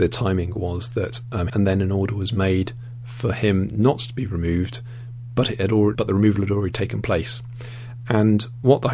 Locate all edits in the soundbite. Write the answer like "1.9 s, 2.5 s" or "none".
1.5 s, 5.9 s